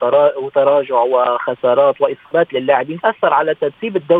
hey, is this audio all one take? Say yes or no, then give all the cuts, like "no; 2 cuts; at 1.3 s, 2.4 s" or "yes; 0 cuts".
no; 1 cut; at 3.0 s